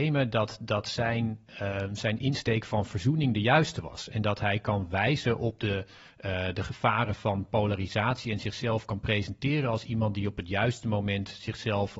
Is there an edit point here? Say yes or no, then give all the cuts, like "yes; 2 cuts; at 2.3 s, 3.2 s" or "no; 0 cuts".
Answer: no; 0 cuts